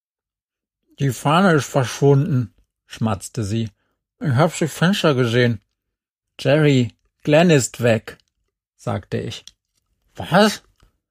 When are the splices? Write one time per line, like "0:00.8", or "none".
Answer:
0:06.2